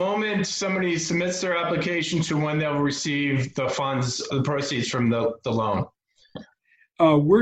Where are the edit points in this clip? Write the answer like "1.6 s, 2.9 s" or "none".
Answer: 4.3 s